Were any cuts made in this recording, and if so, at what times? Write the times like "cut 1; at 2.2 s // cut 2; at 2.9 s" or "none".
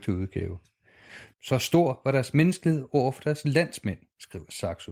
cut 1; at 1.3 s